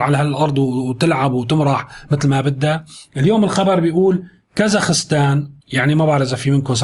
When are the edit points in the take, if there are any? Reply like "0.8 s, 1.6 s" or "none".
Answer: 5.6 s